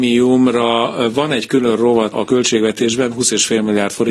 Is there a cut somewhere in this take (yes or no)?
yes